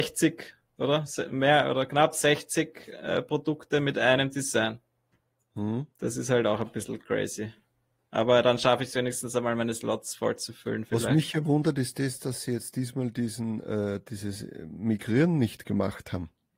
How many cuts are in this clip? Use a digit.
1